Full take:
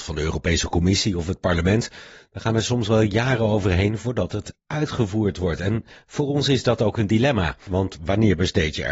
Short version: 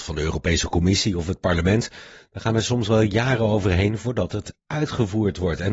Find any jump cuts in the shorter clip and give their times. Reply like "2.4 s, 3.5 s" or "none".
none